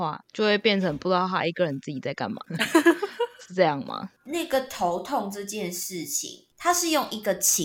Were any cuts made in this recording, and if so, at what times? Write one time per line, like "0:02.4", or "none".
none